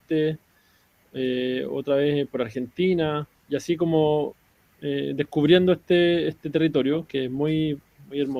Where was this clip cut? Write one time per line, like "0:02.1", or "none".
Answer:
none